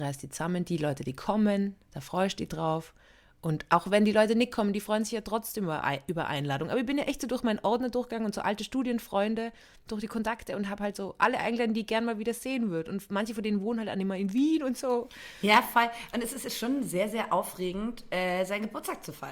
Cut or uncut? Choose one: uncut